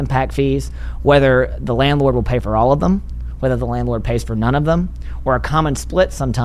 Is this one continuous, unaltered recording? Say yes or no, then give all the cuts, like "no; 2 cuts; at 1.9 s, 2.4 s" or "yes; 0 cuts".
yes; 0 cuts